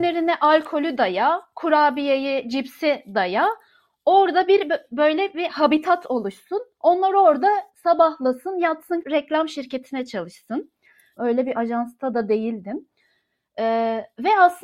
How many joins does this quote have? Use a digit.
2